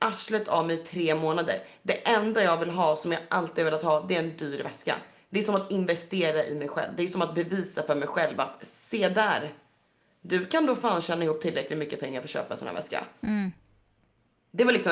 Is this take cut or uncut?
uncut